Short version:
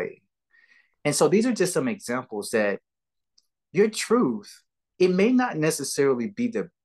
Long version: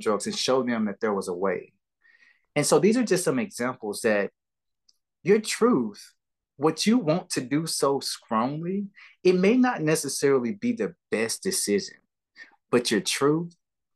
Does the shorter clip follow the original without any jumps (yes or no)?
no